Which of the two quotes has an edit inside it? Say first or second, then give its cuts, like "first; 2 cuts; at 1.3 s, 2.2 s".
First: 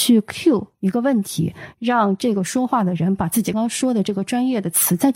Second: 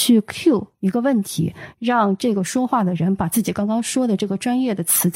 first; 1 cut; at 3.5 s